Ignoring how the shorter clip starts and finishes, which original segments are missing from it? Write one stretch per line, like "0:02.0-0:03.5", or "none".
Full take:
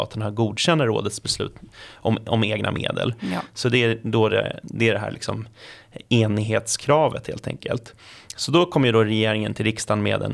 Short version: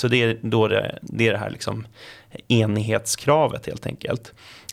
none